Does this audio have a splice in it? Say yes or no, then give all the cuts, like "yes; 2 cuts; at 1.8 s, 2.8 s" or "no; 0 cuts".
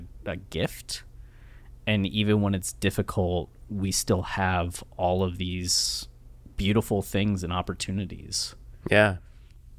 no; 0 cuts